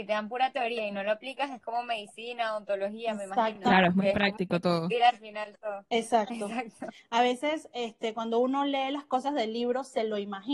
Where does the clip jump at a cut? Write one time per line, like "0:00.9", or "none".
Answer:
none